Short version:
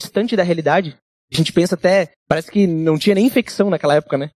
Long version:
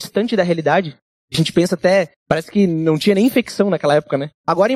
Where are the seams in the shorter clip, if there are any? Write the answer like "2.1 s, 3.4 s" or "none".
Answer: none